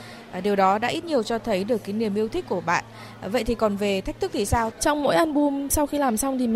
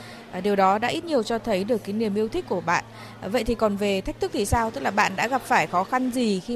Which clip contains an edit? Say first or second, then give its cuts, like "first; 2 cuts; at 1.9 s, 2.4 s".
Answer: first; 1 cut; at 4.7 s